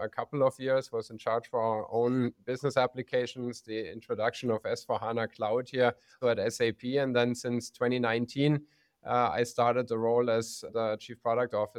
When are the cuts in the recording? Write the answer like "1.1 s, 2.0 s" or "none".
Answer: 6.2 s